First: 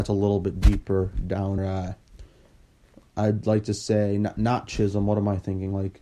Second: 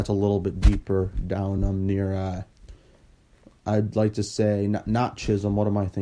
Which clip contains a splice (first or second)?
first